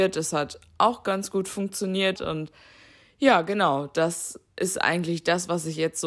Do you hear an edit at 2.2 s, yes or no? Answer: yes